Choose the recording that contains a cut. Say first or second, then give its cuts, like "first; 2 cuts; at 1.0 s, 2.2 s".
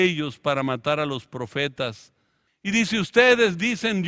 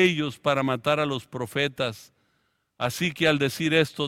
first; 1 cut; at 2.5 s